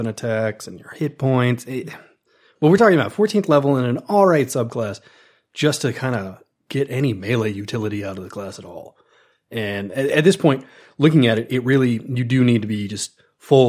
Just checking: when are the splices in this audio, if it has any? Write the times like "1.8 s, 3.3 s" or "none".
none